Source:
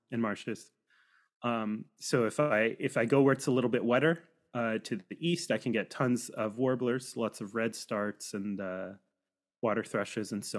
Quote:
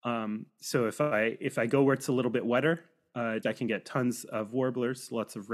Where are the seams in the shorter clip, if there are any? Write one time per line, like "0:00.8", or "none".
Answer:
0:03.4